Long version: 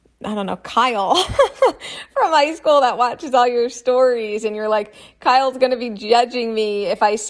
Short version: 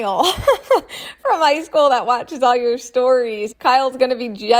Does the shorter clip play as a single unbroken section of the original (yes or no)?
no